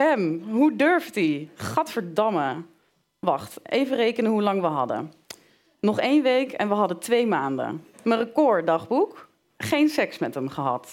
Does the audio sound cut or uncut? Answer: cut